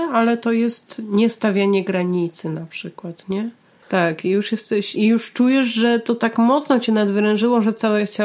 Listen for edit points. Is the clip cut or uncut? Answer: cut